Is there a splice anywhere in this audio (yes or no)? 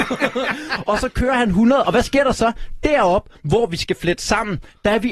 no